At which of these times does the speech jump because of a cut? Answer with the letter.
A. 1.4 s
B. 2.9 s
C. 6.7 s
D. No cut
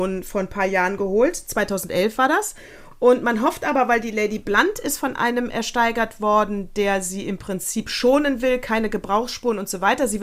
B